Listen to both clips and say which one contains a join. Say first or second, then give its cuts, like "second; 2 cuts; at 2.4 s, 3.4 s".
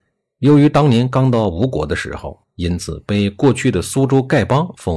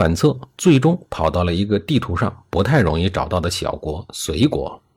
first; 1 cut; at 2.4 s